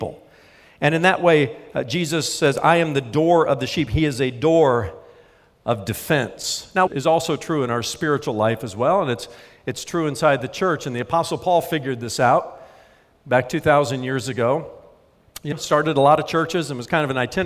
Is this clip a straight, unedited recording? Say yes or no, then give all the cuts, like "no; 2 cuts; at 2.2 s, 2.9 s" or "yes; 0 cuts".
no; 2 cuts; at 6.9 s, 15.5 s